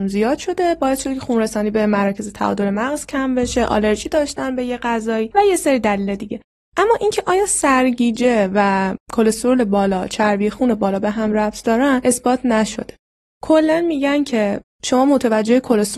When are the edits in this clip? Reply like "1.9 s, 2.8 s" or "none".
none